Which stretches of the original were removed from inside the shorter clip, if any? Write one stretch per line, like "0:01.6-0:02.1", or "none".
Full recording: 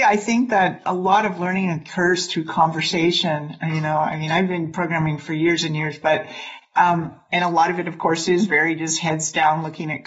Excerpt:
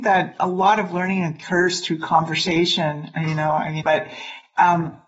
0:04.3-0:06.0